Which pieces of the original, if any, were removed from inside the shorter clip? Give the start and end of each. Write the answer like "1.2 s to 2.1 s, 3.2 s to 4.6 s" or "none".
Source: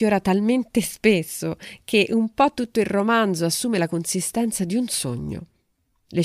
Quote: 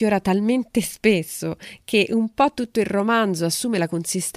none